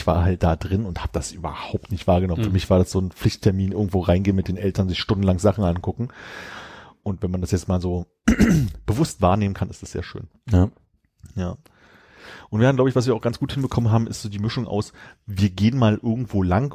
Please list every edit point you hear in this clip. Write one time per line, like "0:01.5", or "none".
none